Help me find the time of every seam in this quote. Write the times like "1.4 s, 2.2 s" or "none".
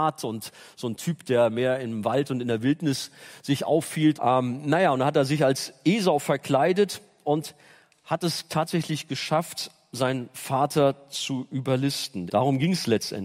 4.2 s, 12.3 s

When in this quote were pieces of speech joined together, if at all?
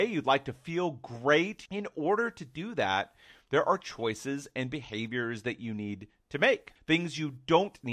1.7 s, 6.8 s

